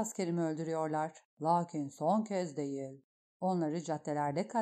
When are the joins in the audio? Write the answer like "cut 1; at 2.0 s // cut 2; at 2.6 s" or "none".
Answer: cut 1; at 1.3 s // cut 2; at 3.3 s